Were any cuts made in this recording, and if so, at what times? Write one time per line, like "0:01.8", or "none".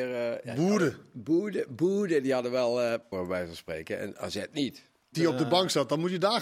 0:03.1
0:05.1